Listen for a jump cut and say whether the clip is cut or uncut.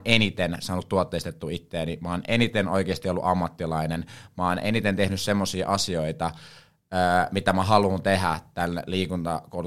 uncut